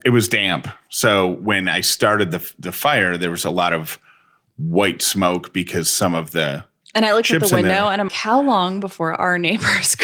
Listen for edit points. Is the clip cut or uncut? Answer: cut